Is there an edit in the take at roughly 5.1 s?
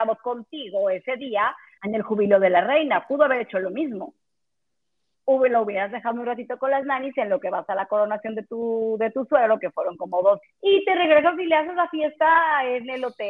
yes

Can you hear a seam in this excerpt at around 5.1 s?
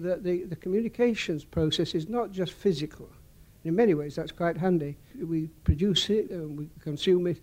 yes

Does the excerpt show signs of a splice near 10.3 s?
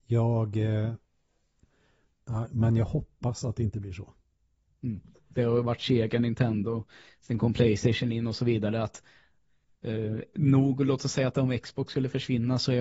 no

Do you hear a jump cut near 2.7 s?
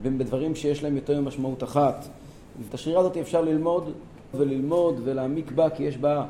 yes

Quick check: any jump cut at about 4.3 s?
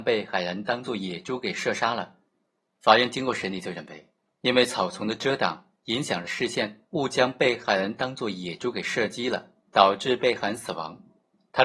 yes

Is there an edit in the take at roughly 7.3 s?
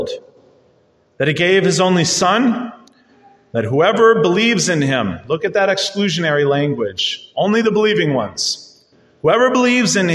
no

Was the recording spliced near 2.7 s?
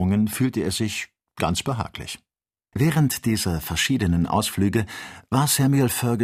yes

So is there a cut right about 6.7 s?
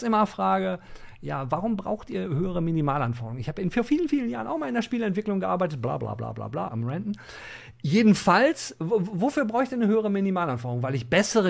yes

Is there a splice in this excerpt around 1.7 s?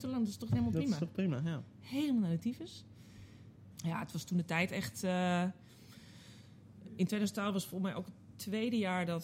no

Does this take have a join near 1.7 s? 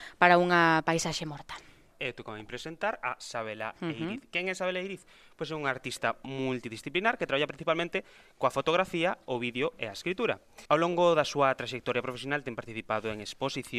no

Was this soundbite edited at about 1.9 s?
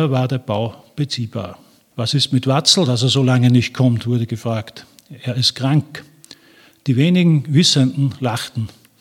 yes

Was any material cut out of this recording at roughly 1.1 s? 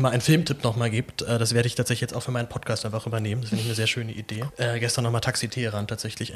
no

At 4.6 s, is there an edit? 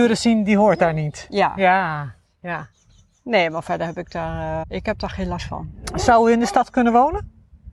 yes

